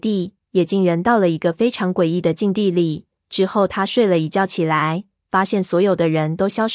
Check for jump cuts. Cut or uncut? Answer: uncut